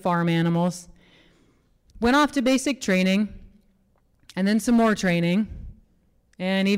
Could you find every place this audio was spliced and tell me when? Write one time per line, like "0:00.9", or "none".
0:01.9

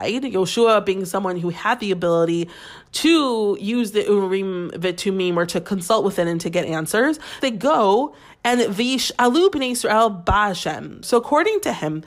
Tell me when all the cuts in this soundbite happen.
0:07.4
0:11.0

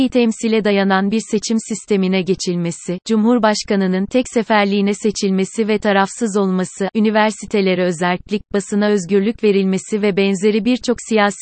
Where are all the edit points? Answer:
0:06.9

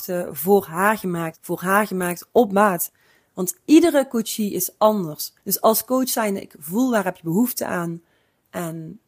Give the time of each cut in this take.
0:01.3
0:05.4

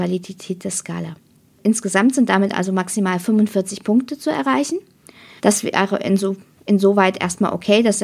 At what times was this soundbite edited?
0:05.4

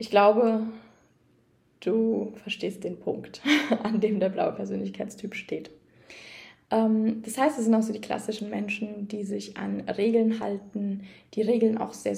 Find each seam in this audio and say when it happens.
none

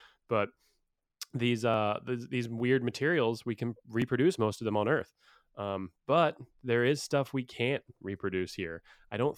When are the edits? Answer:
none

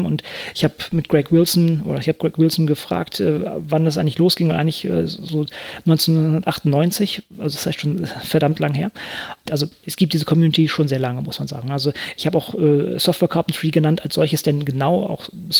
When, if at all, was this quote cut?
0:09.5

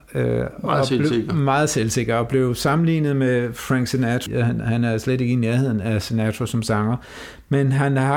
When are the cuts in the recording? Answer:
0:04.3

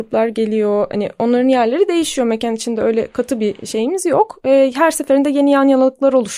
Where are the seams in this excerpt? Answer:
none

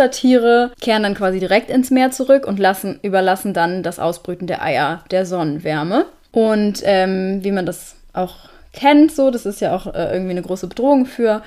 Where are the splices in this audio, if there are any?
none

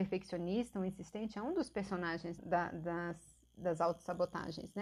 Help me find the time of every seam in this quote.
0:02.4

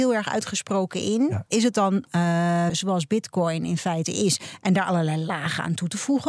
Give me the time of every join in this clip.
0:01.5
0:02.7

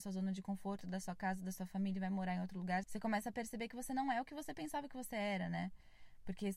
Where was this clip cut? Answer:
0:02.8

